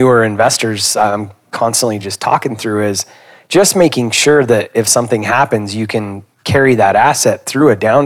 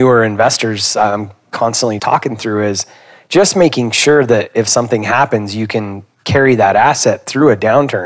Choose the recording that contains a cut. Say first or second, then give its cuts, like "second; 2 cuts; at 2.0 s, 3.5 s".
second; 1 cut; at 2.0 s